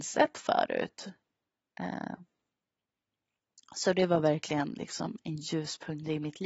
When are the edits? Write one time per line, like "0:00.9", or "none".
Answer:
none